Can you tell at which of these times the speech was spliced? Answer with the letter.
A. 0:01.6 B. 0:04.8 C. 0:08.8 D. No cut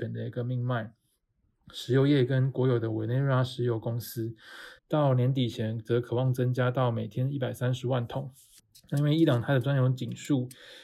B